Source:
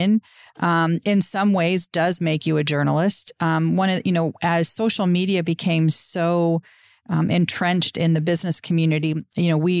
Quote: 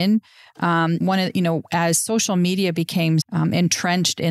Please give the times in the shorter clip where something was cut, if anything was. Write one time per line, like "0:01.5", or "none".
0:01.0
0:03.2